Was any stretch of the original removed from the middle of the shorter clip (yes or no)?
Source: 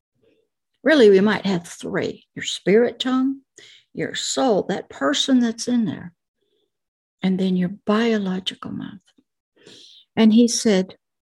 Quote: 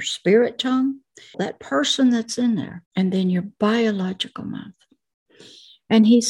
yes